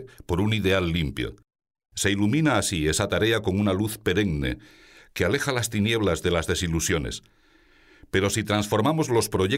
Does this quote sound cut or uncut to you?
cut